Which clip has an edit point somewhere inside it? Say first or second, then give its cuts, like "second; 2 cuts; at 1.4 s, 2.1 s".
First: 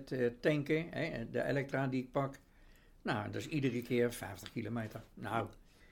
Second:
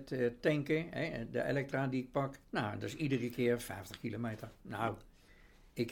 second; 1 cut; at 2.4 s